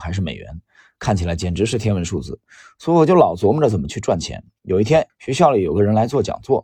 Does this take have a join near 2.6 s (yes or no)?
no